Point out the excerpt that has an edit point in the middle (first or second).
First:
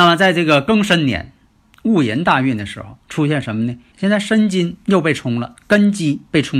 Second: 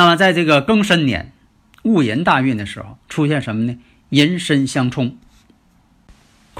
first